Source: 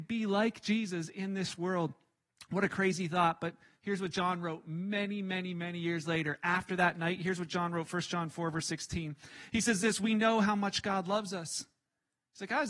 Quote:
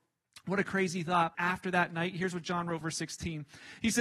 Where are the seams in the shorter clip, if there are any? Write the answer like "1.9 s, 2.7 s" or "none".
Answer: 1.3 s, 2.8 s